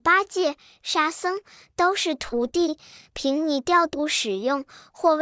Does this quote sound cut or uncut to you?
uncut